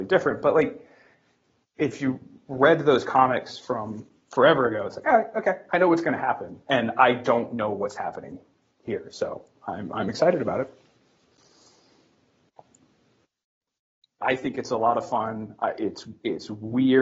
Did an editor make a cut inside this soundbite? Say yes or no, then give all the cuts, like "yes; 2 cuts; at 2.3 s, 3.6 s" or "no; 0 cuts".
yes; 1 cut; at 14.2 s